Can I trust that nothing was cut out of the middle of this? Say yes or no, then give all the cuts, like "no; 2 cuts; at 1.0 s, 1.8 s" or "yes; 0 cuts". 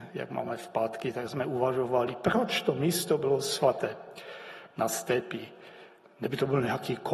yes; 0 cuts